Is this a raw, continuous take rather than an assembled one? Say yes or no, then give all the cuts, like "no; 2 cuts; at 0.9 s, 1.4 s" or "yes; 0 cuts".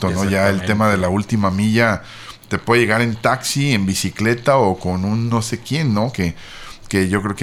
yes; 0 cuts